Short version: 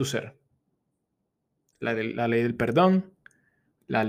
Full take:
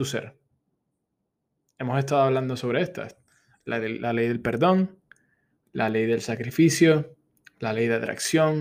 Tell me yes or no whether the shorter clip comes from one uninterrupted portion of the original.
no